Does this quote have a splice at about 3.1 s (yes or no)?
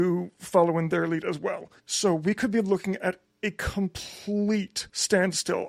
no